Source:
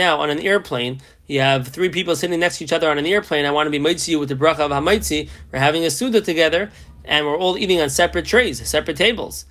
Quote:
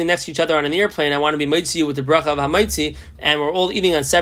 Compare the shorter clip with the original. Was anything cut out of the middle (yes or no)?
yes